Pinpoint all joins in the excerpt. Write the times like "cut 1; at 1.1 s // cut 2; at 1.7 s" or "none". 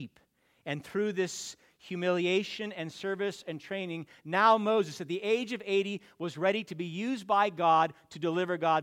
none